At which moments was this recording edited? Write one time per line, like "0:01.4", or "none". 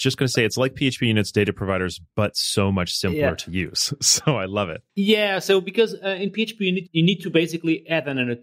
0:04.9